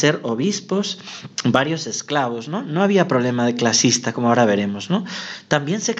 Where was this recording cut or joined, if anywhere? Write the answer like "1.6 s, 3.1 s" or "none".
1.3 s